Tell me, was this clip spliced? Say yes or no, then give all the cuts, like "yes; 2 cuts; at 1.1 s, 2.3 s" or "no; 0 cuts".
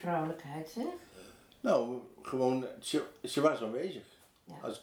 no; 0 cuts